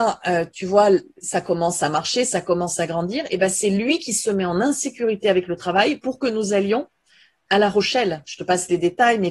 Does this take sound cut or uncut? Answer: uncut